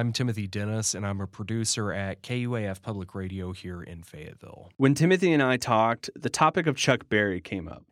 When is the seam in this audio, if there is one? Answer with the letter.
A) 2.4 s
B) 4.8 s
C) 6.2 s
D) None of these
D